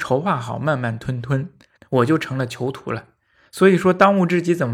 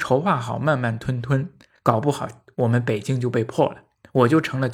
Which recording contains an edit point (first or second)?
first